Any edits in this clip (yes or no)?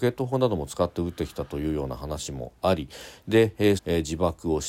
yes